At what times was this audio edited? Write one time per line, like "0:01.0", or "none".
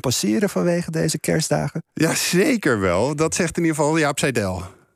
none

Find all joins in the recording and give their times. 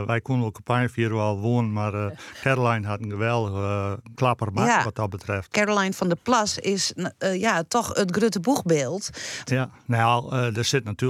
0:04.1
0:05.5
0:09.4

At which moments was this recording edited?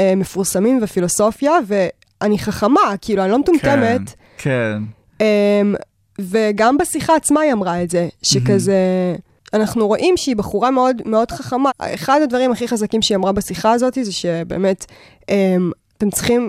0:04.4
0:11.7

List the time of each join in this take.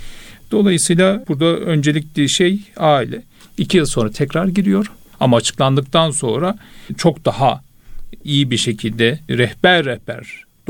0:03.4
0:05.1

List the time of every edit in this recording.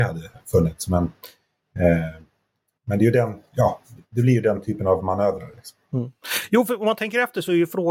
none

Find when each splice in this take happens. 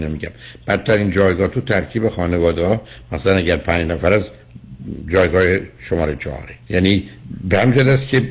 0:06.6

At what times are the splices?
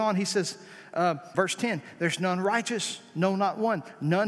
0:01.3

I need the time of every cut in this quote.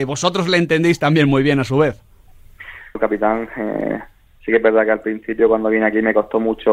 0:03.0

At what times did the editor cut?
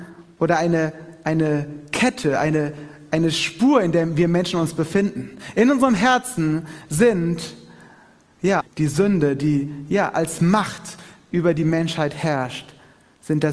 0:08.6

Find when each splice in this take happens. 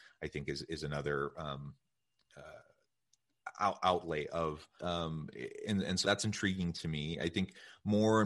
0:04.8
0:06.0

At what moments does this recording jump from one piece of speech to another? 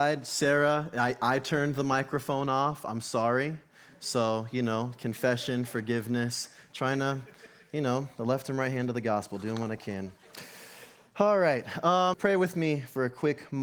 0:12.1

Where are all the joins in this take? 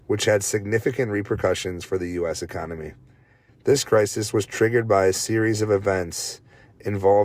0:03.5

